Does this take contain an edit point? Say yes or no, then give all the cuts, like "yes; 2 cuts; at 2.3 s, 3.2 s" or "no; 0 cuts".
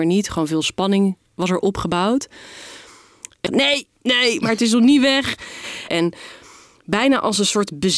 yes; 2 cuts; at 3.5 s, 5.9 s